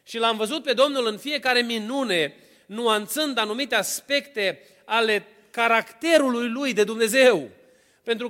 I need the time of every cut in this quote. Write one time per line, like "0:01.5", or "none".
none